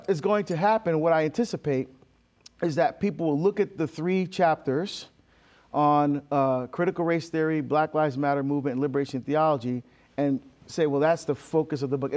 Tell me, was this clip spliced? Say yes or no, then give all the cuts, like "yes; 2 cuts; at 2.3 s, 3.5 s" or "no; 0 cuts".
no; 0 cuts